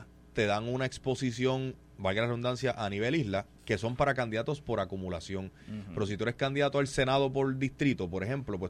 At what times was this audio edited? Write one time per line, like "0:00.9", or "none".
none

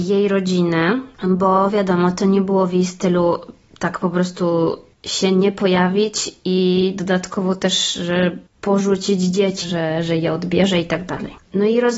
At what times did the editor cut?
0:09.6

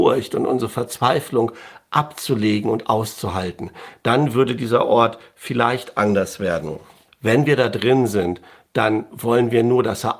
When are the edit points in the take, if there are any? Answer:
0:07.1

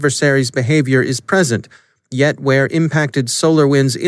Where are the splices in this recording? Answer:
none

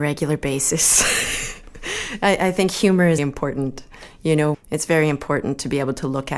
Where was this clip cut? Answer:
0:03.2
0:04.5

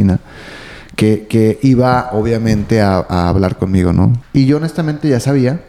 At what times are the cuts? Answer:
0:04.2

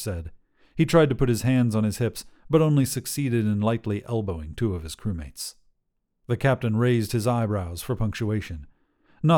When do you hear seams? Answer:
0:06.1

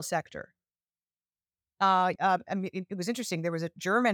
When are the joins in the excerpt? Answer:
0:02.2

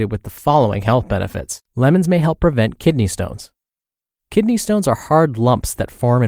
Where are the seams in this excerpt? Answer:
0:01.7

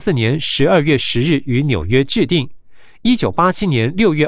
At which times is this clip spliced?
none

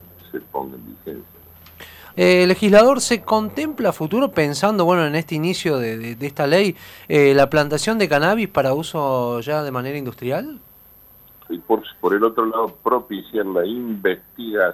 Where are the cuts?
0:02.1
0:11.5

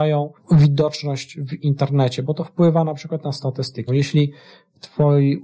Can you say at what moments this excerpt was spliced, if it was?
0:03.9

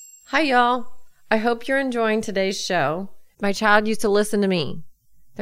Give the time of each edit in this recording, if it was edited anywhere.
0:03.3

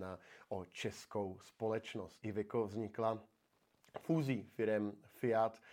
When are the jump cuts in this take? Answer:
0:02.2

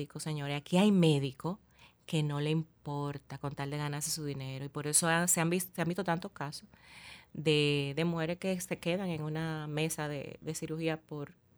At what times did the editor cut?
none

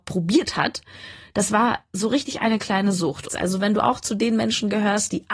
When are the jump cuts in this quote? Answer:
0:03.3

